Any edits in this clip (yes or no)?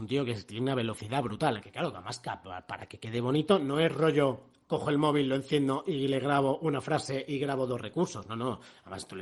yes